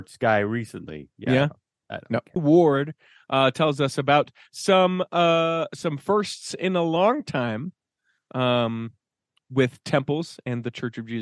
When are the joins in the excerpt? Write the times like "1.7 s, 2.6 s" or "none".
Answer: 2.4 s